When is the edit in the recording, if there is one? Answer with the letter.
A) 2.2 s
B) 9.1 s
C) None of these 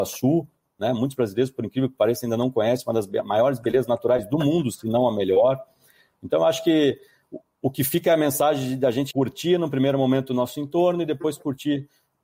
B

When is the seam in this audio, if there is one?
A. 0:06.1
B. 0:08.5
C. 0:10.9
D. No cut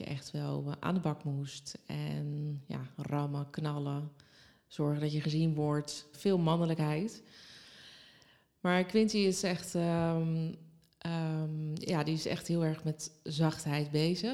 A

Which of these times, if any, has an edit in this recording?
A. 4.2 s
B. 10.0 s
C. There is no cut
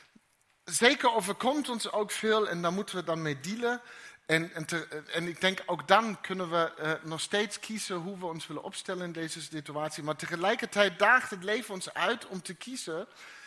C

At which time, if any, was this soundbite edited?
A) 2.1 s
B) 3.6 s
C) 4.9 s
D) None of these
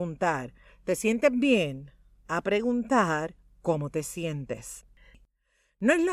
D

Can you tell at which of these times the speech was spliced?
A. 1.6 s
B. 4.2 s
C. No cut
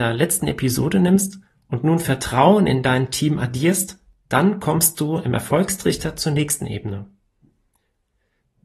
C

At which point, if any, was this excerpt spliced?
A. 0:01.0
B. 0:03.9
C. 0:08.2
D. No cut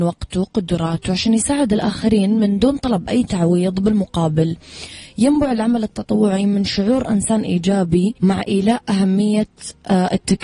C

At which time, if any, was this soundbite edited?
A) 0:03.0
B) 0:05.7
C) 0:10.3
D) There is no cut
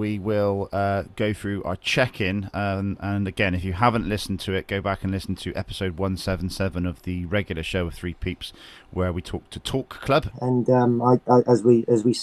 C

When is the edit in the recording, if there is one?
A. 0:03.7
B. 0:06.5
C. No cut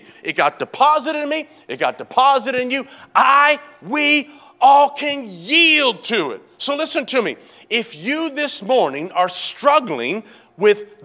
C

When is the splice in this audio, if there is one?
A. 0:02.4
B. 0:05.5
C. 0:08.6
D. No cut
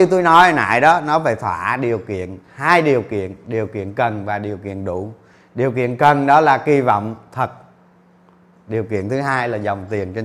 A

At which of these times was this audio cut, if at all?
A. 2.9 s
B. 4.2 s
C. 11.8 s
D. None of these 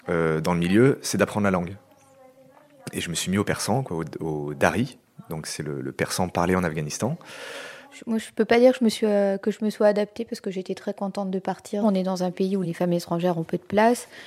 C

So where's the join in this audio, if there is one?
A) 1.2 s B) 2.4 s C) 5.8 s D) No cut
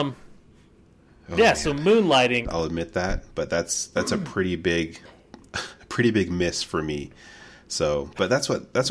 B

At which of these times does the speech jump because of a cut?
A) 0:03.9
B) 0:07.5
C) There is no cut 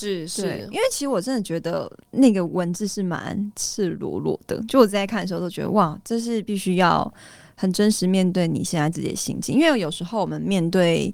C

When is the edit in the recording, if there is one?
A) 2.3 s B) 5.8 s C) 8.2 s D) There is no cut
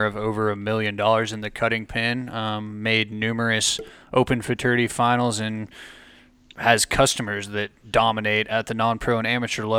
D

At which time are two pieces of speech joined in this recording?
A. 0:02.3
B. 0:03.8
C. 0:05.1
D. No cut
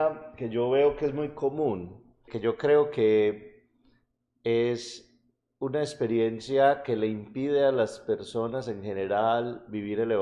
A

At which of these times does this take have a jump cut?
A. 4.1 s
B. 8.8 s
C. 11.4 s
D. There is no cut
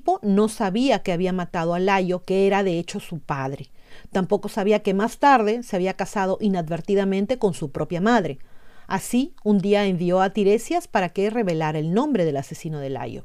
D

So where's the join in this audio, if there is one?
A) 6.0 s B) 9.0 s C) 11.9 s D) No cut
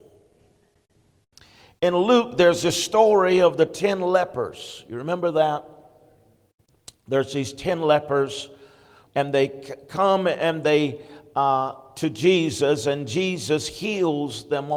B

